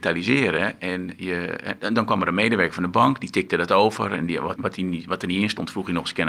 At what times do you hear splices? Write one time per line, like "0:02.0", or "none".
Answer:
0:04.6